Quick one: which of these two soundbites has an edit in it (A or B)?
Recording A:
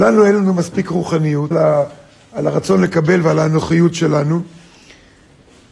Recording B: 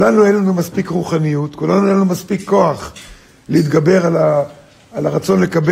A